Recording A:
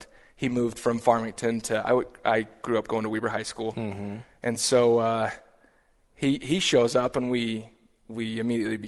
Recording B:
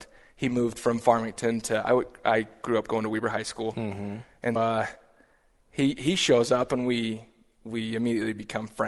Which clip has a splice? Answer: B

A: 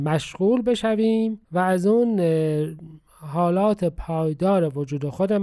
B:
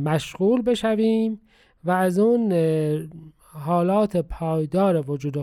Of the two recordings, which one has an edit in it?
A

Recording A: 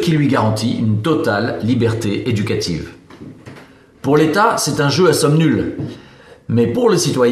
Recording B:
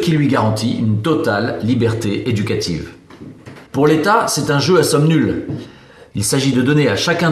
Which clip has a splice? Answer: B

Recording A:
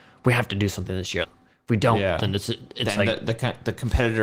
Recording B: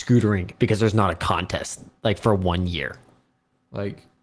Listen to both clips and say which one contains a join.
A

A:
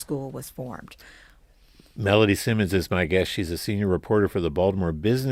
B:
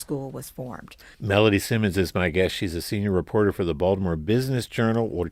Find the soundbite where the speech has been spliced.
B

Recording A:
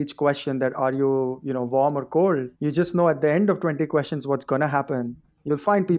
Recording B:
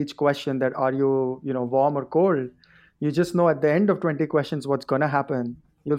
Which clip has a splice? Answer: A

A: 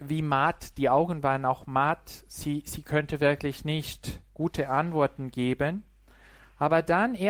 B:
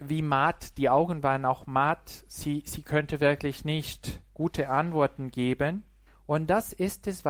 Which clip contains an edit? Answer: B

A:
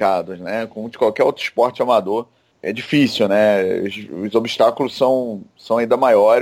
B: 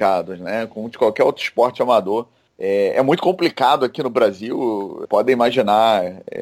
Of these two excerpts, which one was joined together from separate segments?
B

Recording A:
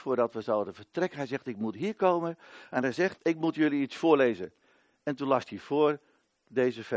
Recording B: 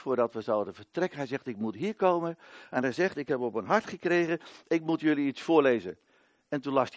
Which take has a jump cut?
A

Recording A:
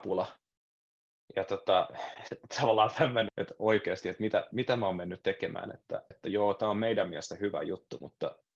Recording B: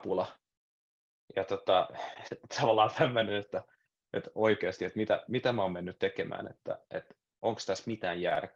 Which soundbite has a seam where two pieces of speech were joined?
A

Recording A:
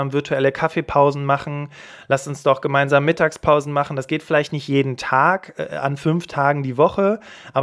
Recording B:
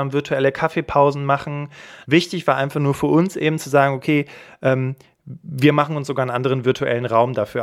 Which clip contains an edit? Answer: B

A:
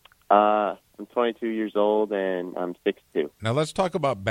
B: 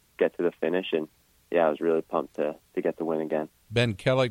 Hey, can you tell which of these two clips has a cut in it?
A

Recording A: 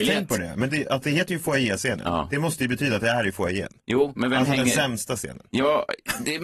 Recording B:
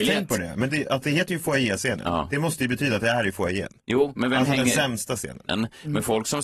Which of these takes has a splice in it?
B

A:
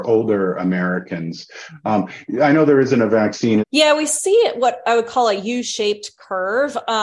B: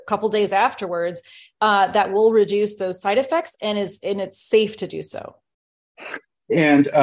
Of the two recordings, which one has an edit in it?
A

